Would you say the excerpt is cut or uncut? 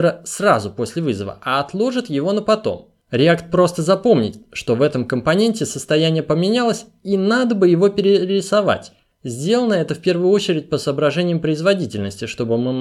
uncut